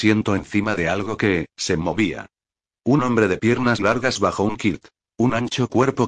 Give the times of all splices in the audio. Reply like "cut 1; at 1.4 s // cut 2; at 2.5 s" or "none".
cut 1; at 3.8 s